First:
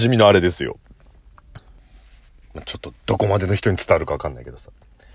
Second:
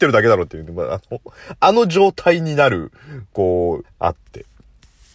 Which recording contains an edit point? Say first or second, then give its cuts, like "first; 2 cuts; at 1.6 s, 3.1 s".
second; 1 cut; at 3.8 s